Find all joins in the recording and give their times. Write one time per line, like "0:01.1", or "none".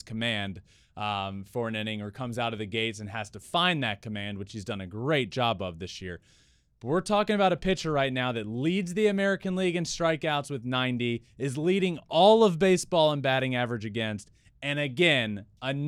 none